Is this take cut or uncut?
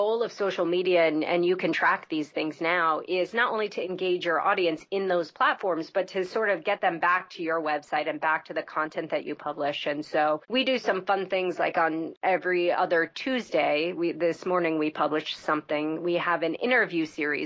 uncut